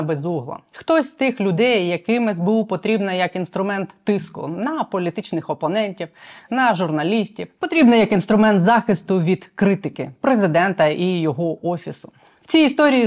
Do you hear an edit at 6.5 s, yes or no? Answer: yes